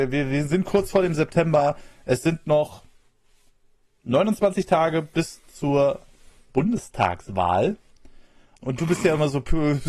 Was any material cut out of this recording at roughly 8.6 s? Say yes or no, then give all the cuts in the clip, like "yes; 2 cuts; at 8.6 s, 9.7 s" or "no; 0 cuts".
yes; 1 cut; at 8.6 s